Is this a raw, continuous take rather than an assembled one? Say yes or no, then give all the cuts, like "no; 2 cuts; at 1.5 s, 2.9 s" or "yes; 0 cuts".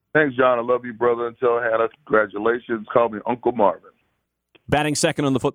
yes; 0 cuts